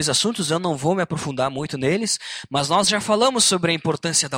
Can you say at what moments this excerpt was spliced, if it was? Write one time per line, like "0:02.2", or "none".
none